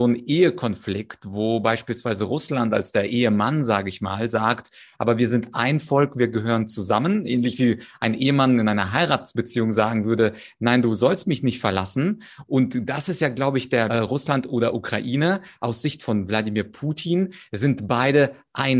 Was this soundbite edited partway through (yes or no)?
yes